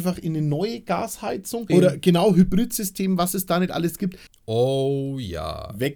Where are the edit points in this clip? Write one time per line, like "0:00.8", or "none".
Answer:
0:01.7
0:04.3

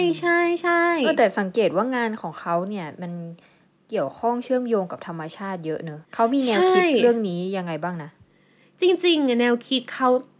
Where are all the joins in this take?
0:06.0

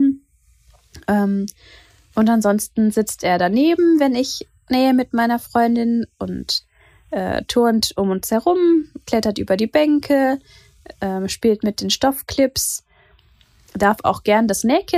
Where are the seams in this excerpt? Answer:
none

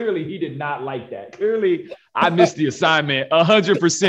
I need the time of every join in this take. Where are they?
none

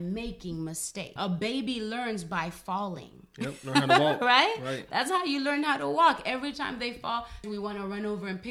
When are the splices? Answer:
0:01.2
0:07.4

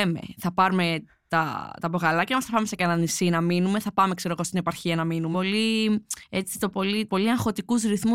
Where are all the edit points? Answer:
0:05.3
0:07.1

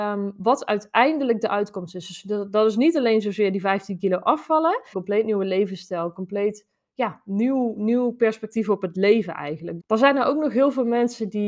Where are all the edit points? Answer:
0:04.9
0:09.8

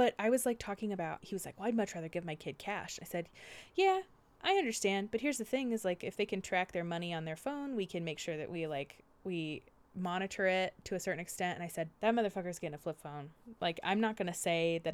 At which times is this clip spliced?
0:01.2
0:11.9
0:13.6

